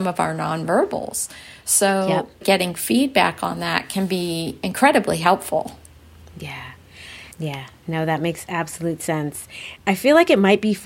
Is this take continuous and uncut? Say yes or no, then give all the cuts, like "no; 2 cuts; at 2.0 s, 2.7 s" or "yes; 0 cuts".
yes; 0 cuts